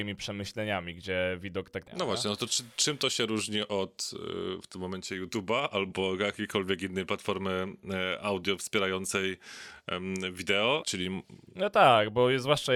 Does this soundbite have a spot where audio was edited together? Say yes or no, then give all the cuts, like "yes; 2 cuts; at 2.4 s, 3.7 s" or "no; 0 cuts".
yes; 2 cuts; at 1.9 s, 10.8 s